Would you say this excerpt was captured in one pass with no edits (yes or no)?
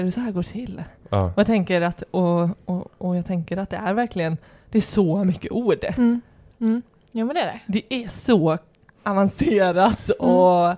yes